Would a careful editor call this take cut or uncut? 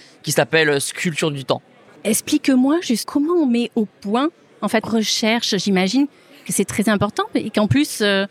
cut